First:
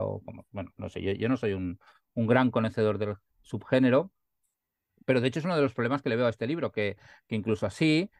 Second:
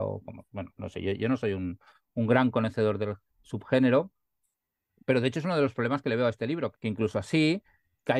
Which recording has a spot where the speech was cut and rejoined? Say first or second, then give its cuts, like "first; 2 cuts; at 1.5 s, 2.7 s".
second; 1 cut; at 6.7 s